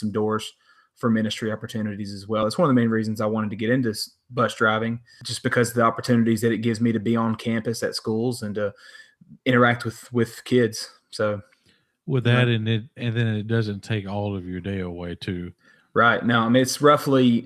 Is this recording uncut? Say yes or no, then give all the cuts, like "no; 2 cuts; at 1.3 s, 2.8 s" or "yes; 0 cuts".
yes; 0 cuts